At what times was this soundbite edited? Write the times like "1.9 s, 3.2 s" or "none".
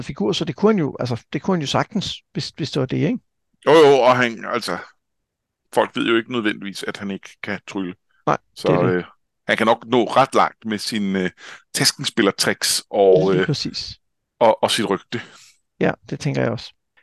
none

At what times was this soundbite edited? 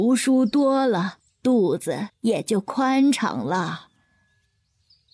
none

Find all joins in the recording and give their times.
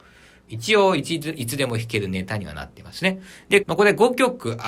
3.6 s

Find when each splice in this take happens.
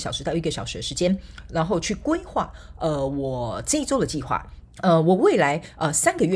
4.6 s

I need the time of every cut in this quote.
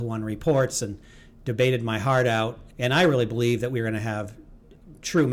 2.7 s

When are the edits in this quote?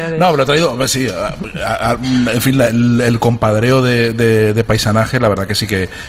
none

